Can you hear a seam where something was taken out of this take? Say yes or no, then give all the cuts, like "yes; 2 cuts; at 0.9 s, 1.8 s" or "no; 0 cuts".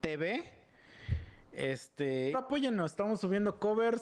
yes; 1 cut; at 2.3 s